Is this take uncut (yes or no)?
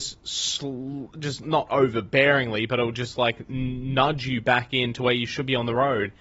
no